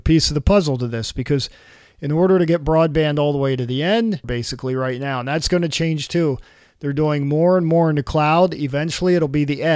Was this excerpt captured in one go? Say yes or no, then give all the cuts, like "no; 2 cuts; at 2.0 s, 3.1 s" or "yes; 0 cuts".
no; 1 cut; at 4.2 s